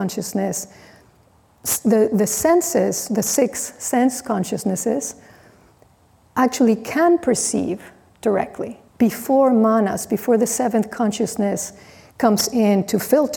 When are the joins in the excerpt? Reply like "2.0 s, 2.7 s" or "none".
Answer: 8.9 s